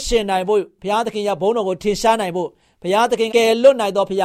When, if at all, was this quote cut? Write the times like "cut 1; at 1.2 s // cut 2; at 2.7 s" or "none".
cut 1; at 3.3 s